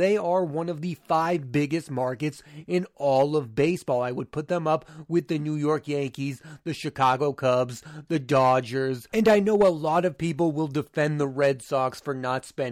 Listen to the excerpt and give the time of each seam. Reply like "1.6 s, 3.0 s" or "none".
none